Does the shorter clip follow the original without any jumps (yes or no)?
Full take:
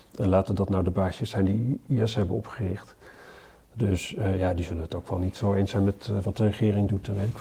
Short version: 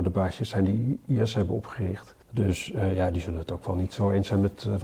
no